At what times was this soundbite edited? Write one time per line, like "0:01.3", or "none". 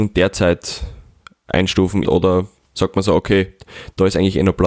0:02.0